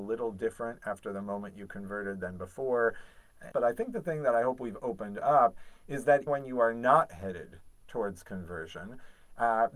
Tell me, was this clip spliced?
yes; 2 cuts; at 3.5 s, 6.3 s

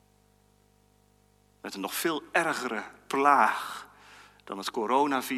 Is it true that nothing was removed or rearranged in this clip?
yes; 0 cuts

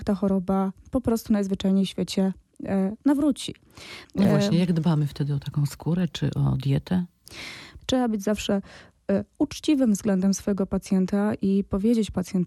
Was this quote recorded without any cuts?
no; 2 cuts; at 4.0 s, 7.8 s

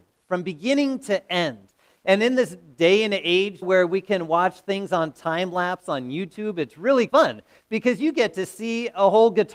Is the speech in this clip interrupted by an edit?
yes; 2 cuts; at 3.6 s, 7.1 s

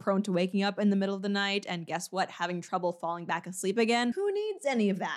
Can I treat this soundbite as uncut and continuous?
no; 1 cut; at 4.1 s

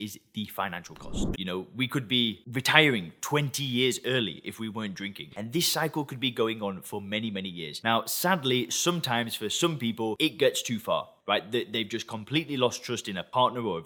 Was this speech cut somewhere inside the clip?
yes; 2 cuts; at 1.3 s, 5.3 s

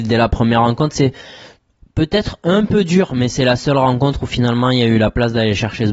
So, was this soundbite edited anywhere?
no; 0 cuts

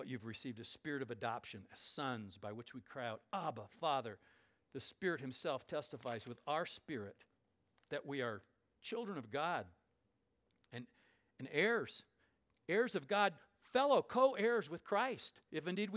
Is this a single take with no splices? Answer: yes; 0 cuts

